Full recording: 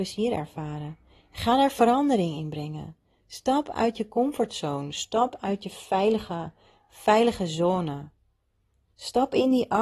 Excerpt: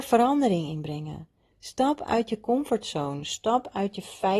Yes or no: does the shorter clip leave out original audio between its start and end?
no